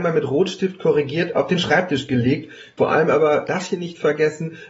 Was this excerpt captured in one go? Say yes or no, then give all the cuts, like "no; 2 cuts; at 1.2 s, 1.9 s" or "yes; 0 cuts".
no; 1 cut; at 2.8 s